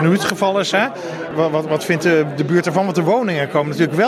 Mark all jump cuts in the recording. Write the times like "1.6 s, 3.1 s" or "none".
none

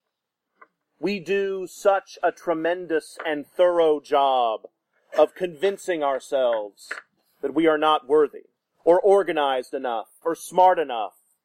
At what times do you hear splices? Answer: 8.7 s, 10.2 s

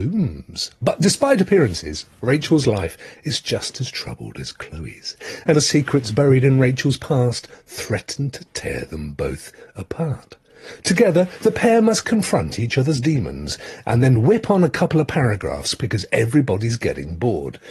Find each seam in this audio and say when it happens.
5.5 s

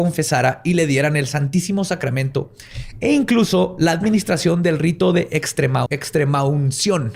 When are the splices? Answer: 5.9 s

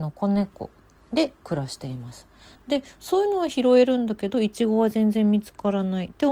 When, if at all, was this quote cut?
2.6 s

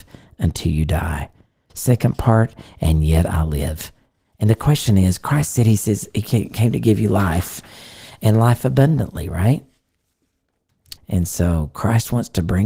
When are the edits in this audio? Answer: 1.7 s, 11.0 s

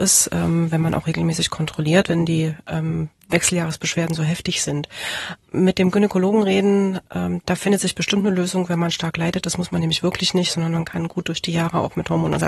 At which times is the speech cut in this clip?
none

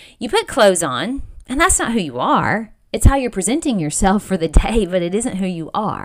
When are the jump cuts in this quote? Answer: none

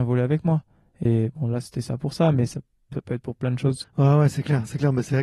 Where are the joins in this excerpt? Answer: 1.1 s, 3.8 s

